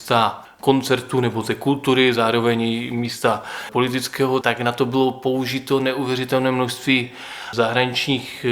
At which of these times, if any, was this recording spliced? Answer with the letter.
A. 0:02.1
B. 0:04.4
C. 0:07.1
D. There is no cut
B